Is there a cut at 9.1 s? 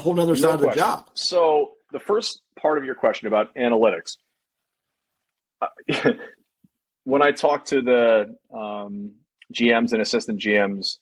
no; 1 cut; at 1.9 s

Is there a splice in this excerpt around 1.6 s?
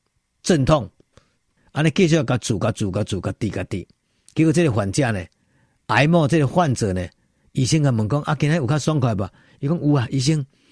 yes; 1 cut; at 1.6 s

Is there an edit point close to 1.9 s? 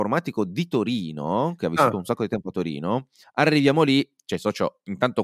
no; 1 cut; at 3.2 s

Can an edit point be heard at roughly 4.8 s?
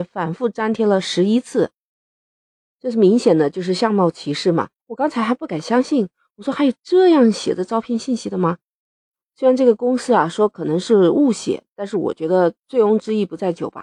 yes; 1 cut; at 4.8 s

